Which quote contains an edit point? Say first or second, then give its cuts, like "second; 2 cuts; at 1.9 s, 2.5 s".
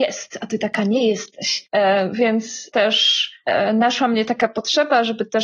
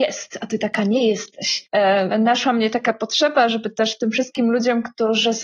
second; 1 cut; at 2.1 s